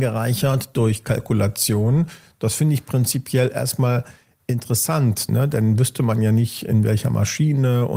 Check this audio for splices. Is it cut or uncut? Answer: cut